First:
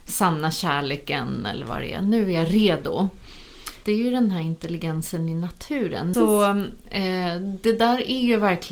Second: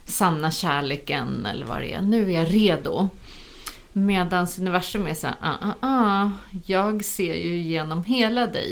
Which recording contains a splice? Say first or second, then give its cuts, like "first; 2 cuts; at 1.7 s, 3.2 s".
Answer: first; 2 cuts; at 3.8 s, 6.1 s